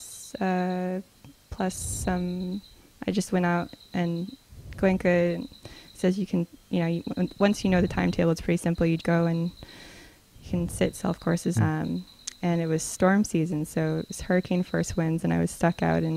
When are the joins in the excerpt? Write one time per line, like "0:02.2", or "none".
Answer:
0:09.0
0:11.6